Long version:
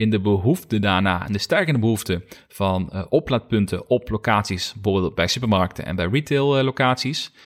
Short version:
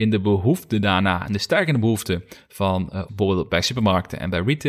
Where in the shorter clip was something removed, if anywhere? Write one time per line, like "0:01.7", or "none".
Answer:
0:03.1